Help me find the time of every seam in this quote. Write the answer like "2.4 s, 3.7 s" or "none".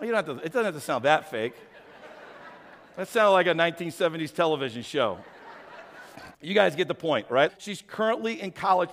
6.3 s, 7.5 s